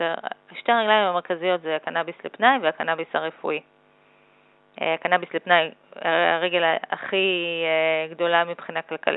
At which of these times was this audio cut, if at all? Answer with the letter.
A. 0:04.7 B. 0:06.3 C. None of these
C